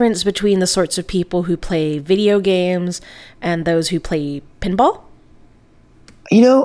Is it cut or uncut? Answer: uncut